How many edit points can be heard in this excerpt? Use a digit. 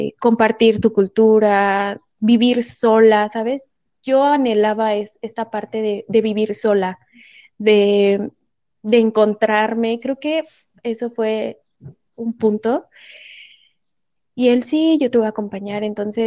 1